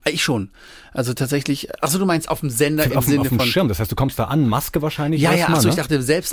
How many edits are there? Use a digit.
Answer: 0